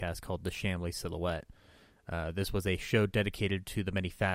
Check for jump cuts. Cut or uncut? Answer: uncut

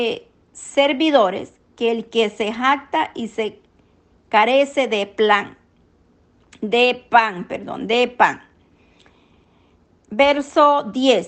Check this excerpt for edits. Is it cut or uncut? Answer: uncut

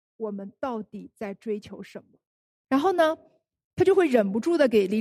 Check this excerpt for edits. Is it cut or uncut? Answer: cut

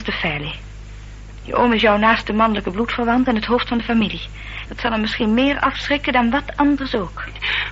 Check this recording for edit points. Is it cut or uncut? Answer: cut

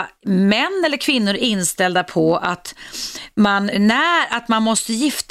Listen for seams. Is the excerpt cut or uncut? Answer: cut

